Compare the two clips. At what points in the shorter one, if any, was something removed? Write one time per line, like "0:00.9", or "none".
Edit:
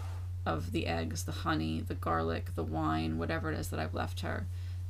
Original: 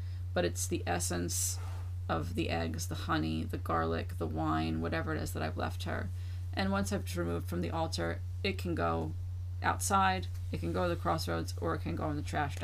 none